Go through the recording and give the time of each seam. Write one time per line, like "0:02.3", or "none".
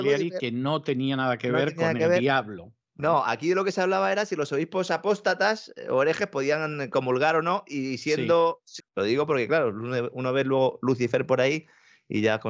0:08.8